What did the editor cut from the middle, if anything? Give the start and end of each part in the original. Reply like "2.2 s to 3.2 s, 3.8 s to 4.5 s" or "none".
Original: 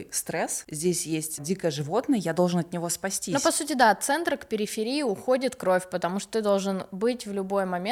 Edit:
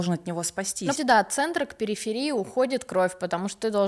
3.4 s to 3.7 s